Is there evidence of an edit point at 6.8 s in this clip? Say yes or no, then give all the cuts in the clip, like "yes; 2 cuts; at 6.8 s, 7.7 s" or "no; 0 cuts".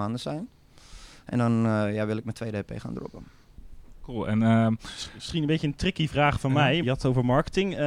yes; 1 cut; at 6.8 s